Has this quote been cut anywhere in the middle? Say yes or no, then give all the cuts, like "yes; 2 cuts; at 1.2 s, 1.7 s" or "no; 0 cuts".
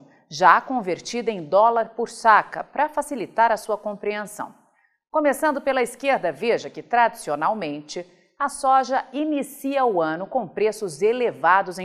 no; 0 cuts